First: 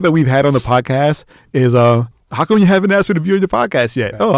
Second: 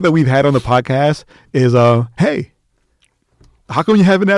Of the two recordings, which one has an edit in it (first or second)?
first